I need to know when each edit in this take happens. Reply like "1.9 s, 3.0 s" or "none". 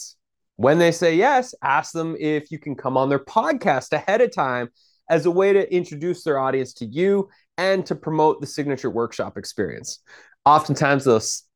none